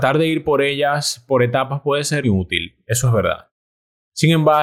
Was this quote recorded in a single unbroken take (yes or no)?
no